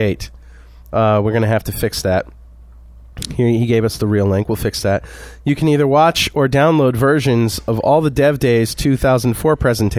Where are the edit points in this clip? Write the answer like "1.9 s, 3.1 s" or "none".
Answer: none